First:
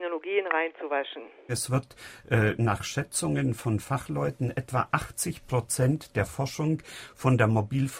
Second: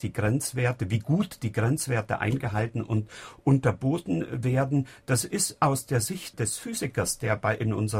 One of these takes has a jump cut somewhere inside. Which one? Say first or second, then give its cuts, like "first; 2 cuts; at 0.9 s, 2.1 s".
first; 1 cut; at 1.5 s